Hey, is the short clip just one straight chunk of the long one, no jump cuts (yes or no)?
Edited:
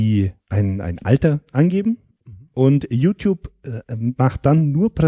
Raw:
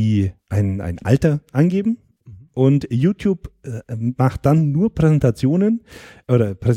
yes